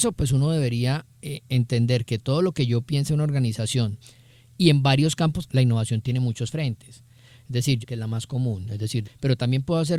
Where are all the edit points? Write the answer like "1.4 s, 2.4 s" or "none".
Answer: 5.5 s, 7.8 s, 9.0 s